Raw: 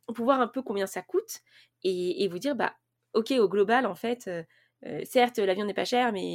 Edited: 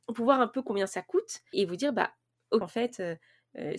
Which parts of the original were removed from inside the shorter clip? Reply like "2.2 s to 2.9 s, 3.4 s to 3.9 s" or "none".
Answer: 1.5 s to 2.2 s, 3.2 s to 3.9 s